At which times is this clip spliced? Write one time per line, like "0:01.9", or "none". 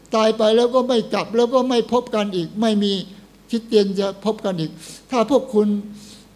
none

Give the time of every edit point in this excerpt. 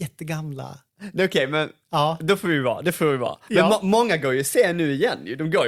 none

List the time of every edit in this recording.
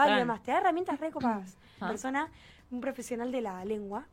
0:01.8

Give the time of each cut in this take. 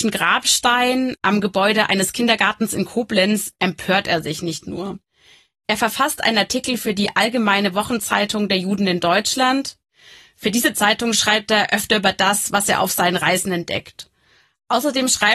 none

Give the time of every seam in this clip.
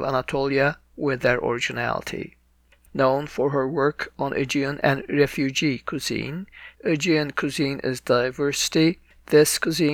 0:02.8
0:06.7

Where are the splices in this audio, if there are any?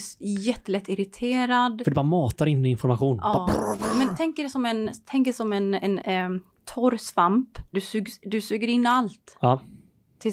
0:06.0
0:07.7

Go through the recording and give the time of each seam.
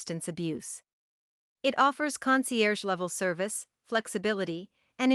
0:01.5

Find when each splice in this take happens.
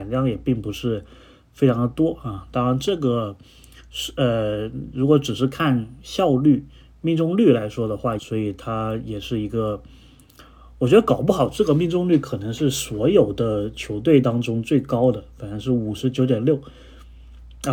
0:08.2

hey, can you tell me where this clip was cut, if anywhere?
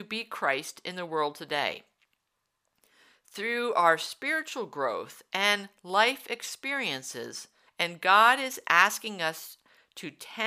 0:07.7

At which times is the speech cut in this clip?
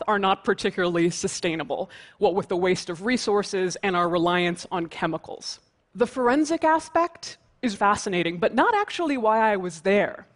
0:05.8
0:07.7

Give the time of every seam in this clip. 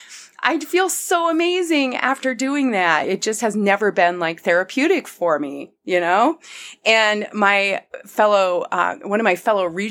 none

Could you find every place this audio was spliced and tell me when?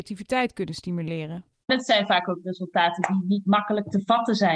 0:01.5

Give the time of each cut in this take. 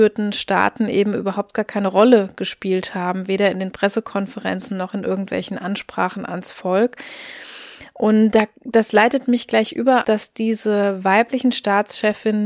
0:08.3
0:10.0

